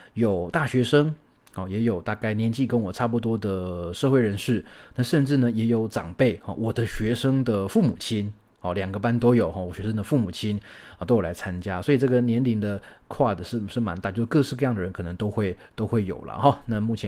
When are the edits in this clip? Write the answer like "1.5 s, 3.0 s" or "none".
none